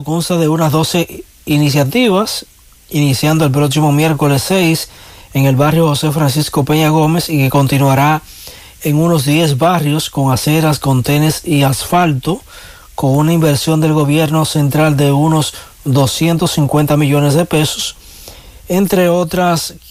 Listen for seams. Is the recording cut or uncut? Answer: uncut